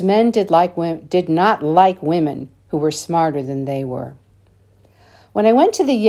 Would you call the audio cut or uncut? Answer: uncut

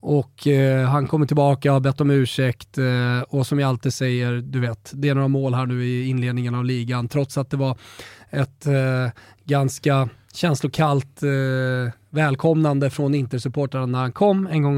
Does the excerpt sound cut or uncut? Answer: uncut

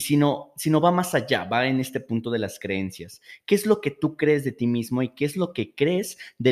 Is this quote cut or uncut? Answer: uncut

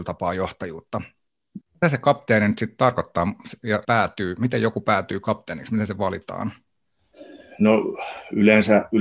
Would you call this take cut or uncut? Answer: cut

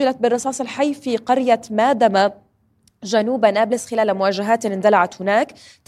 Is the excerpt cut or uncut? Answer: uncut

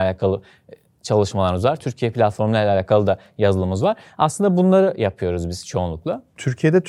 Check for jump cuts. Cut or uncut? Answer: uncut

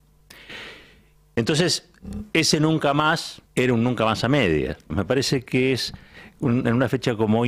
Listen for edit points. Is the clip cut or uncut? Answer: cut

